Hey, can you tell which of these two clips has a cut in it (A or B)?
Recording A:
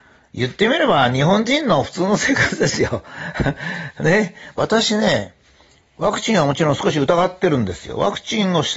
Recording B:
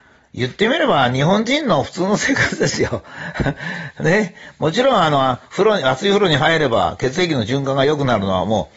A